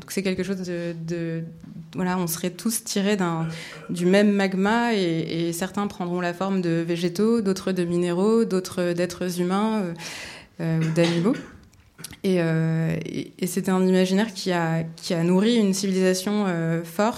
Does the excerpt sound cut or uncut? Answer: uncut